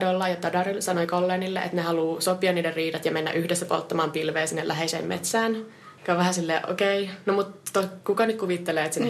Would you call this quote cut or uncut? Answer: cut